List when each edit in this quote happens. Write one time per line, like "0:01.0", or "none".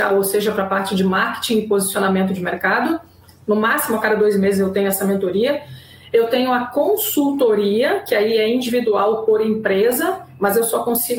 none